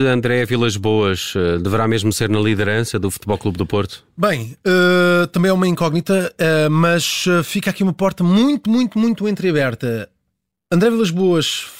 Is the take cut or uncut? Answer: uncut